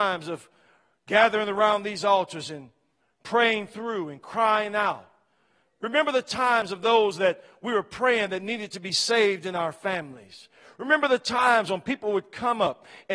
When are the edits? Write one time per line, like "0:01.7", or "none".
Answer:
none